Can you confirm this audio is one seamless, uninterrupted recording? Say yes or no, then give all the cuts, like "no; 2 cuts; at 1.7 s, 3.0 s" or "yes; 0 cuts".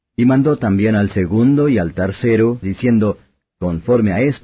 no; 1 cut; at 2.6 s